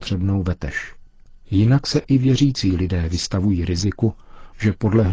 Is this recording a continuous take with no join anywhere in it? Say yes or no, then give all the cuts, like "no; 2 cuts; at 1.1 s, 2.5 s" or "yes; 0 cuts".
yes; 0 cuts